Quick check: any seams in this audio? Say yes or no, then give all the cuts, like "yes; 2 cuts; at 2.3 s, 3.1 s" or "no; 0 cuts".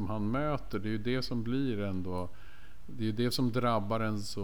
no; 0 cuts